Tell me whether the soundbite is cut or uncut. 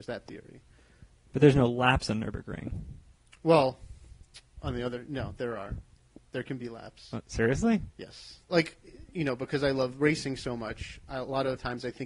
cut